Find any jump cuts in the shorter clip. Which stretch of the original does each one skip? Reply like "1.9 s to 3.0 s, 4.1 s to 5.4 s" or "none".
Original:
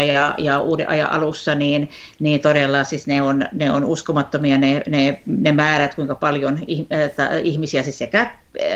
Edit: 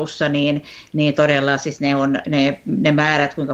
3.5 s to 4.8 s